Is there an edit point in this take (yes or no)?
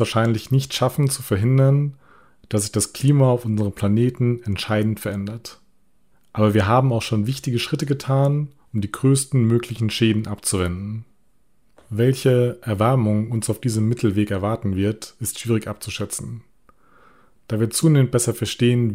no